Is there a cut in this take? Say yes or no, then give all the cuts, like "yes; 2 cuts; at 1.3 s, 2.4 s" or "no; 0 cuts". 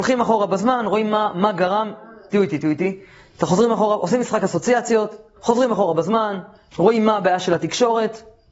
yes; 2 cuts; at 5.4 s, 6.7 s